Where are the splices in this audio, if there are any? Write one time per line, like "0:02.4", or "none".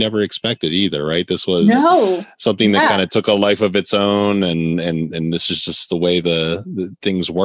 none